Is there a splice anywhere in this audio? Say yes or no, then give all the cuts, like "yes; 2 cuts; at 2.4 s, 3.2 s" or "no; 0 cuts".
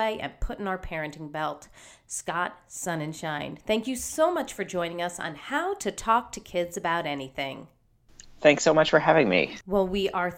no; 0 cuts